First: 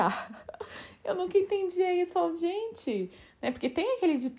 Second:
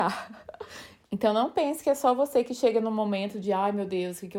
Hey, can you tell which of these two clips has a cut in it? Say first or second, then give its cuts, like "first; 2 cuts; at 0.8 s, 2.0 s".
second; 1 cut; at 1.0 s